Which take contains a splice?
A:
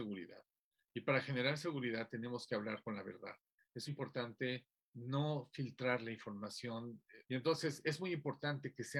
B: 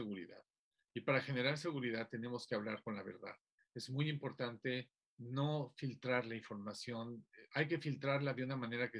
A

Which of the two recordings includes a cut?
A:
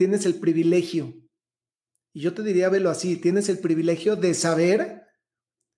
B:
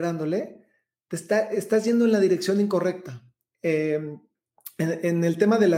B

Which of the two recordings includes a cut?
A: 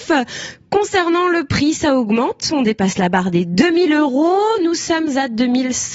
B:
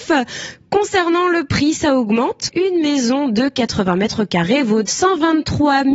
B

